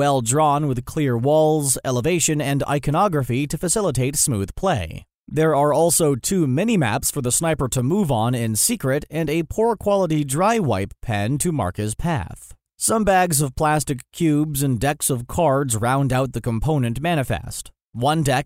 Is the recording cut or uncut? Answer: uncut